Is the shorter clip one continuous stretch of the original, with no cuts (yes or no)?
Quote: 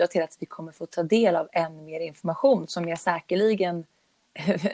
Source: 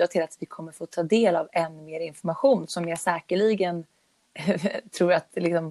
yes